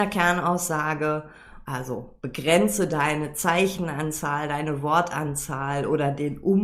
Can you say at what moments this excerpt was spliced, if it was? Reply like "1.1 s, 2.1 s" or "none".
1.6 s